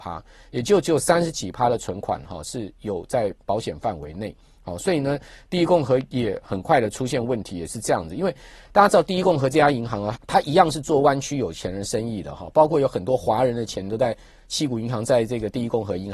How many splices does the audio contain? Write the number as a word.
one